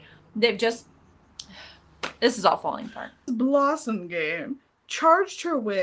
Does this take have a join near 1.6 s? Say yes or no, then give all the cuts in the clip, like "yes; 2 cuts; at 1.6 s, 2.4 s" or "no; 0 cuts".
no; 1 cut; at 3.3 s